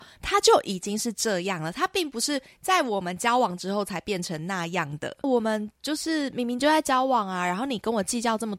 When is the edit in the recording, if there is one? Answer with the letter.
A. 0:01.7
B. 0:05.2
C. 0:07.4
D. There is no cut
B